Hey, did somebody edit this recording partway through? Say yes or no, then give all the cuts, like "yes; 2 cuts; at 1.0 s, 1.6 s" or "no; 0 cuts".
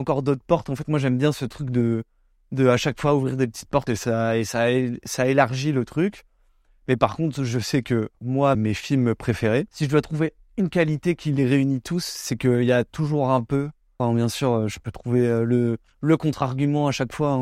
yes; 3 cuts; at 3.9 s, 8.5 s, 14.0 s